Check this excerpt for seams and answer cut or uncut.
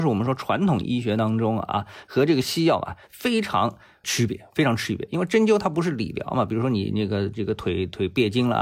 uncut